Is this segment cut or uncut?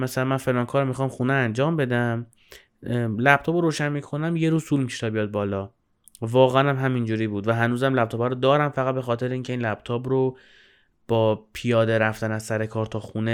uncut